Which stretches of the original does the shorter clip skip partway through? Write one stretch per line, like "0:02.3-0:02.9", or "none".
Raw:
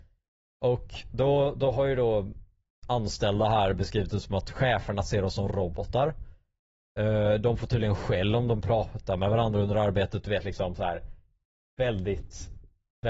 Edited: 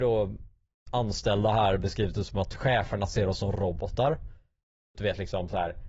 0:06.9-0:10.2